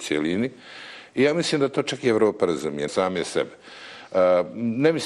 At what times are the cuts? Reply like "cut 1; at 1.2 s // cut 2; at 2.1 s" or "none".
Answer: cut 1; at 2.9 s

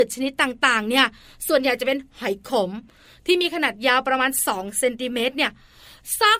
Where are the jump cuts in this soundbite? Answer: none

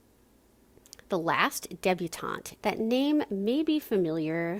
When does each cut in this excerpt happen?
cut 1; at 2.6 s

